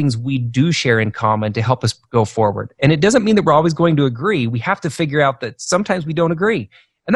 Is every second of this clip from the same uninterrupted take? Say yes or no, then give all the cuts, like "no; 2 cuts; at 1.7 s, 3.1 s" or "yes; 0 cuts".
yes; 0 cuts